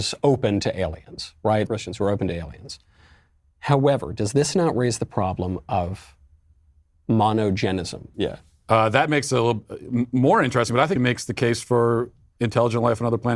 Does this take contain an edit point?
yes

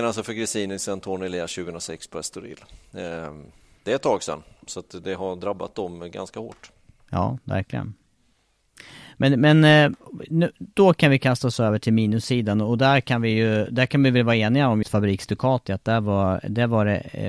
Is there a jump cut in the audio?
yes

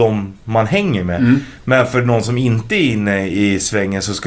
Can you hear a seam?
no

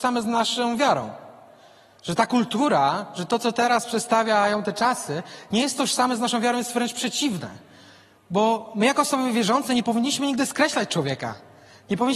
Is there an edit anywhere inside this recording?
no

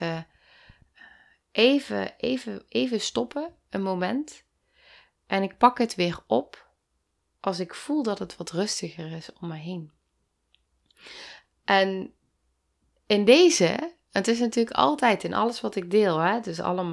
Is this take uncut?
yes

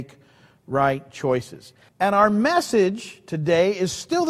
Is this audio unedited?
no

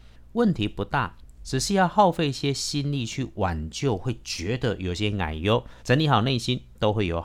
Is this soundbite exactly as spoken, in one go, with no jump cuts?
no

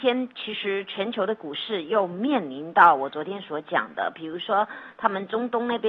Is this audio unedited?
yes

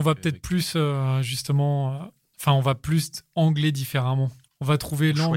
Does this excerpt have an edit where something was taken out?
yes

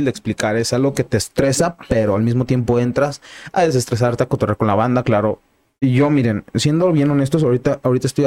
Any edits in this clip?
no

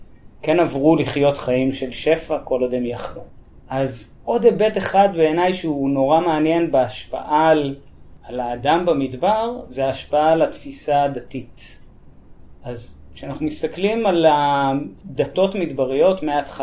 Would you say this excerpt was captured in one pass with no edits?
yes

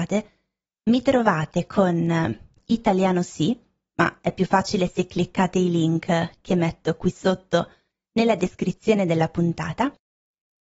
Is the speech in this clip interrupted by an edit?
no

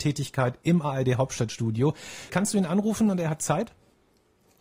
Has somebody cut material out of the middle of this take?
yes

